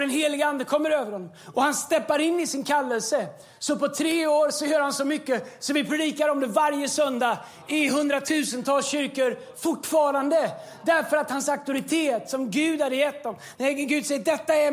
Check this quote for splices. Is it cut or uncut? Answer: cut